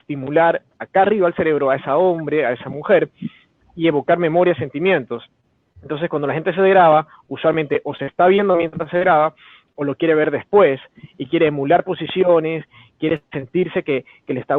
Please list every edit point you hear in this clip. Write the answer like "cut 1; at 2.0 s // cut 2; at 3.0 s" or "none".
none

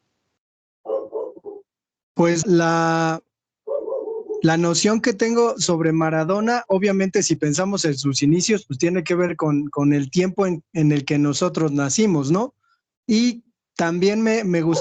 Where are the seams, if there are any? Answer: cut 1; at 2.4 s // cut 2; at 12.9 s

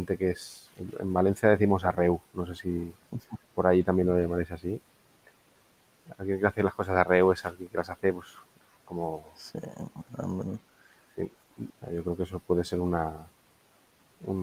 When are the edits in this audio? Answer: cut 1; at 11.7 s

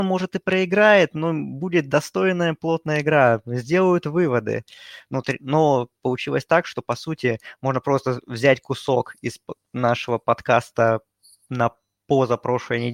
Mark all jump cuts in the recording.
none

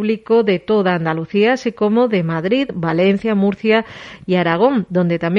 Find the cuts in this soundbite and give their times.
none

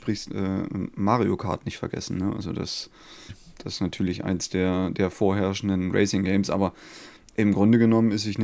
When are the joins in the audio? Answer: cut 1; at 3.3 s

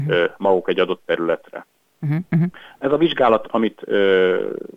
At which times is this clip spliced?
cut 1; at 3.4 s

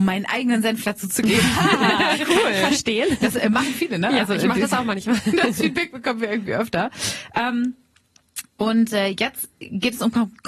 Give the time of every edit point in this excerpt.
none

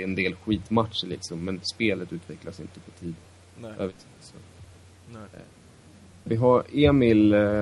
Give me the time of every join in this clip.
cut 1; at 6.3 s

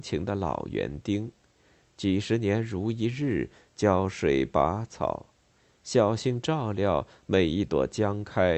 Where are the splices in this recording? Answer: none

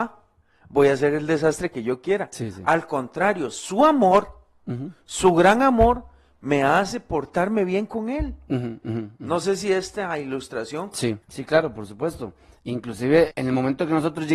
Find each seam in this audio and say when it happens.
cut 1; at 11.2 s // cut 2; at 13.3 s

